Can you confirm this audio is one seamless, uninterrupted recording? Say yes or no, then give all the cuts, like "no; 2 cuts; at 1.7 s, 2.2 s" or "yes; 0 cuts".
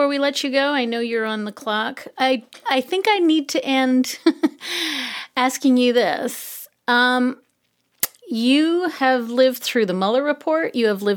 yes; 0 cuts